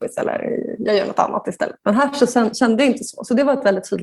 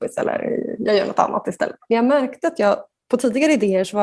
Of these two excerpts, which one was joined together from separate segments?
second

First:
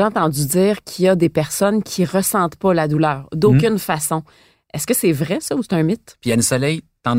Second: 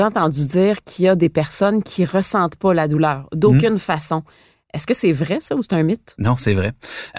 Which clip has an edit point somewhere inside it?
first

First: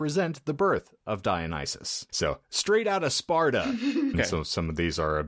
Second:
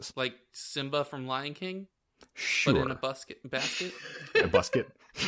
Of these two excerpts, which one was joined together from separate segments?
first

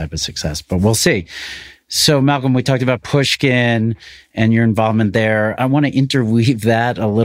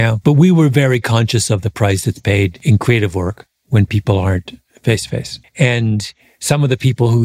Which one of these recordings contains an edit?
second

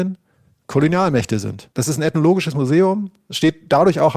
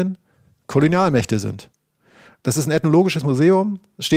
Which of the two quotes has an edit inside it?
first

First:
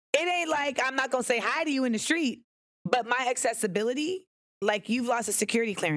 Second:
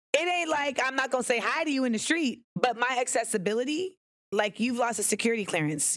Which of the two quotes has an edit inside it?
second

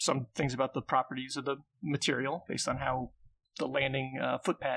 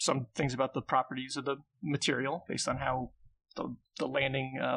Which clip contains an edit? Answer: first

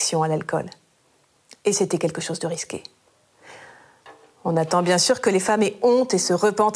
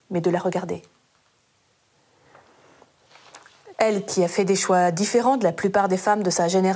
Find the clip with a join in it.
second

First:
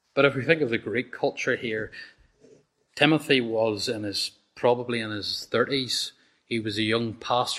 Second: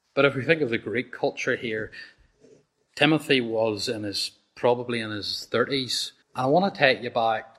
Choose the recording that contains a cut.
second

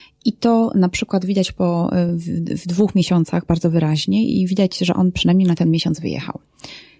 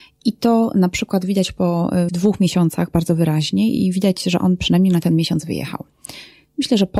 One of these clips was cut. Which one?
second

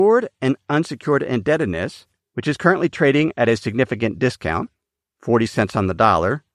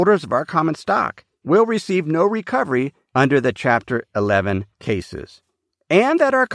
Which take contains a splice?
second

